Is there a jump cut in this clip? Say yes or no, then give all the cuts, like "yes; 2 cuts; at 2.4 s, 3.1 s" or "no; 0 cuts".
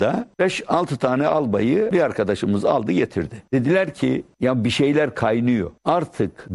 no; 0 cuts